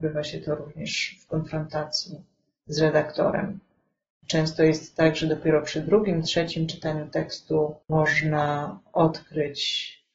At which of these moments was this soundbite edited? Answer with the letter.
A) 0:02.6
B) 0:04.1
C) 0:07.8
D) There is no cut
C